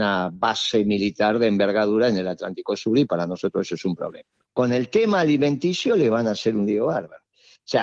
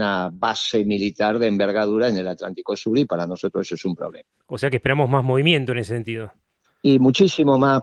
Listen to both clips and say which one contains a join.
first; 1 cut; at 4.4 s

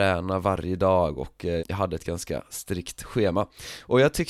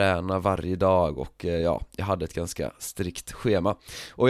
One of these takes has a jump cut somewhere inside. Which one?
first; 1 cut; at 1.6 s

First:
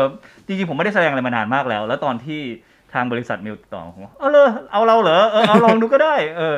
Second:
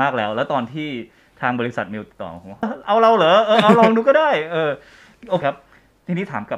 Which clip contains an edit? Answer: second; 2 cuts; at 2.6 s, 5.4 s

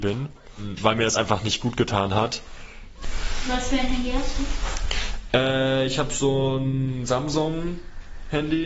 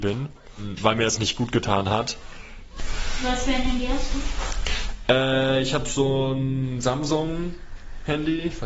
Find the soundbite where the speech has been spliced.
second; 1 cut; at 1.2 s

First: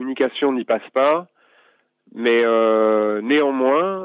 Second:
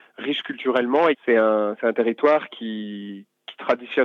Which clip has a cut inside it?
second; 1 cut; at 1.1 s

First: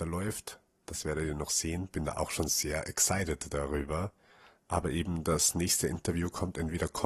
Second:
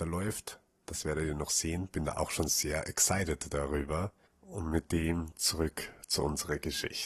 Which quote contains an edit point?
second; 1 cut; at 4.3 s

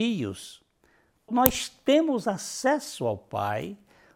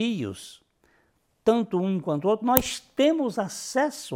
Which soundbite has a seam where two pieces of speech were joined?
first; 1 cut; at 1.3 s

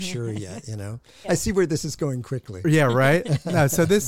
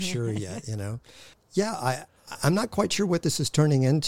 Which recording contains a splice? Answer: first; 1 cut; at 1.2 s

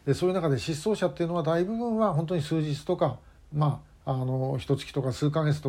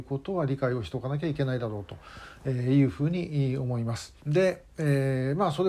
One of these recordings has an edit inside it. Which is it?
second; 1 cut; at 4.2 s

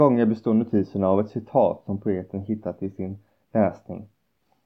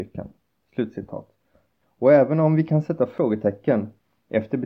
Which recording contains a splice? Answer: second; 1 cut; at 1.8 s

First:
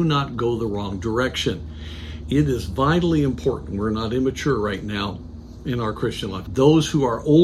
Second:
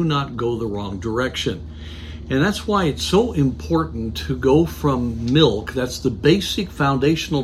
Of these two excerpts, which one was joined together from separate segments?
first; 2 cuts; at 2.2 s, 6.5 s

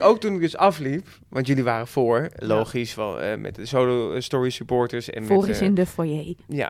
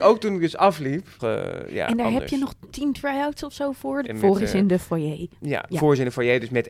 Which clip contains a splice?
second; 3 cuts; at 1.2 s, 2.7 s, 4.0 s

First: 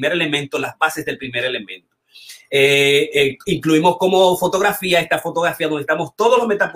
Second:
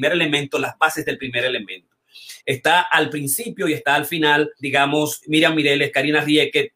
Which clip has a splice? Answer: second; 2 cuts; at 2.4 s, 4.6 s

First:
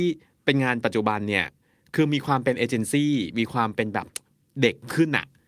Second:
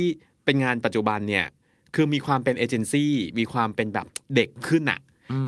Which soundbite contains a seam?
second; 1 cut; at 4.2 s

